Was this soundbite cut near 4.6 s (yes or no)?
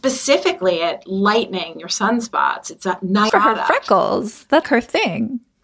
yes